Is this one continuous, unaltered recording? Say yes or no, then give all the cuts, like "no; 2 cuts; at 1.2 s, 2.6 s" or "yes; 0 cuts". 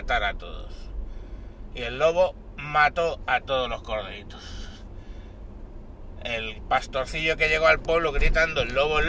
yes; 0 cuts